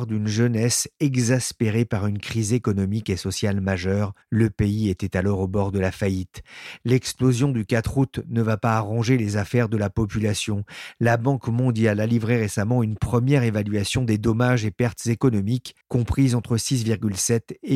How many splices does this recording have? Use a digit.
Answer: 2